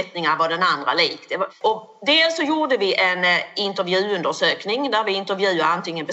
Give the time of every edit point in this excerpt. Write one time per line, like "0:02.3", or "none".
0:01.5